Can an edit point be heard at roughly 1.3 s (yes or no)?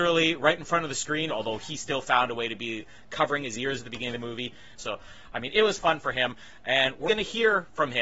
yes